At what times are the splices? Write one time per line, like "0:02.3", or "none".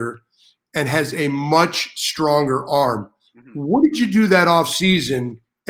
none